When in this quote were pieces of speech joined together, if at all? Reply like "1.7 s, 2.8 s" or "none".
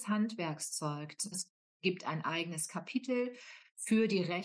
1.3 s